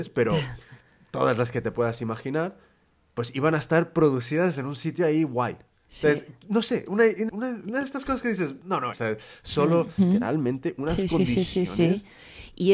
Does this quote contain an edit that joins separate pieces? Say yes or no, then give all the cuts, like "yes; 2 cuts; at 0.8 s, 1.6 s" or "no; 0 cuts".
yes; 3 cuts; at 7.3 s, 8.9 s, 10.0 s